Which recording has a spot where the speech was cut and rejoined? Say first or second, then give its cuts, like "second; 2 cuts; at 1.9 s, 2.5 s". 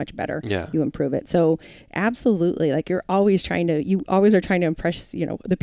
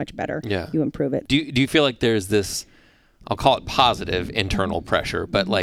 second; 1 cut; at 1.2 s